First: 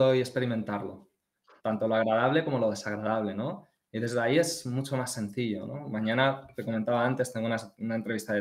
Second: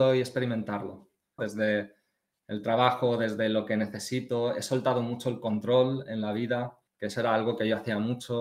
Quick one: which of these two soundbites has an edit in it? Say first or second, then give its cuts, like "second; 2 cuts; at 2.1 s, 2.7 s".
second; 2 cuts; at 1.4 s, 6.9 s